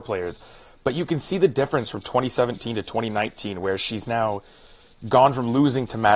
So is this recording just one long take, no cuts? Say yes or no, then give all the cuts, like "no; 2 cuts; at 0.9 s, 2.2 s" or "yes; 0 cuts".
yes; 0 cuts